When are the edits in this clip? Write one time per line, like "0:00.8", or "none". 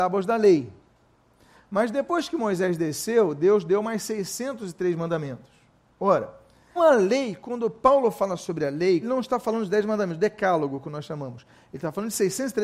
0:06.8
0:09.0